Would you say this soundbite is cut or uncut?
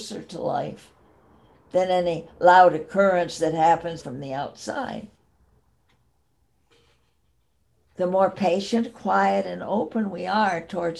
cut